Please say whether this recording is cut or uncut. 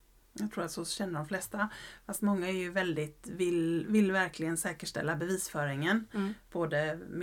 uncut